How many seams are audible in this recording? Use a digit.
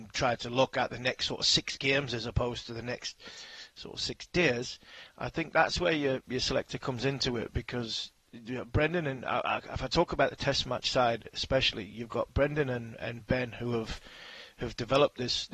0